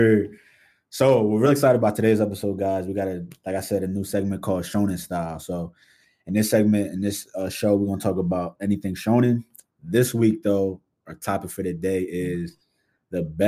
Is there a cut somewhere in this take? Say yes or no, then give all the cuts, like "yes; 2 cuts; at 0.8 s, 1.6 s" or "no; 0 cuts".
no; 0 cuts